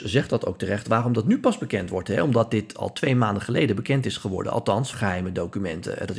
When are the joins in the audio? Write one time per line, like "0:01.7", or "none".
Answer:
0:04.9